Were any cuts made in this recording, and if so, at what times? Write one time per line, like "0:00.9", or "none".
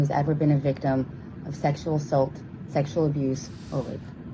none